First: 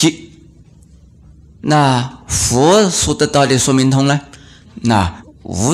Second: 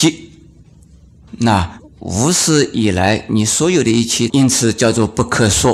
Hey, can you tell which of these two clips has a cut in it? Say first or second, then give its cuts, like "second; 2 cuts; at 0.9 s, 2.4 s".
second; 2 cuts; at 1.3 s, 4.3 s